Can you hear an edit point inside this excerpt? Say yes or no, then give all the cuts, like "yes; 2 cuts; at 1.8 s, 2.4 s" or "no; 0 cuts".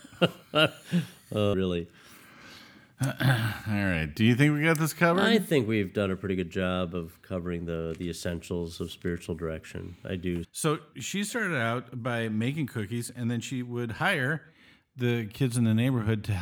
yes; 2 cuts; at 1.5 s, 10.4 s